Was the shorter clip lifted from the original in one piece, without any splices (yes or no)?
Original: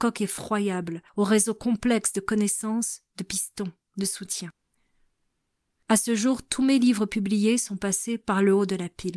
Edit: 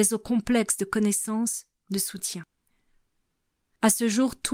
no